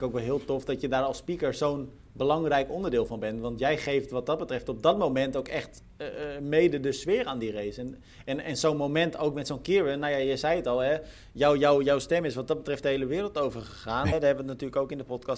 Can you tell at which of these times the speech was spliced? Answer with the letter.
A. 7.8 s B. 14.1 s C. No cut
B